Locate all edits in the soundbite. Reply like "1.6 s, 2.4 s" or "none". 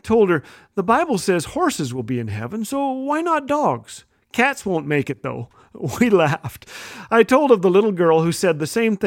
none